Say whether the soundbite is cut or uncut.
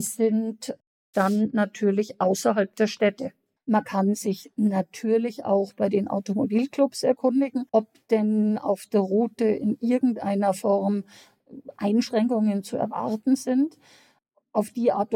cut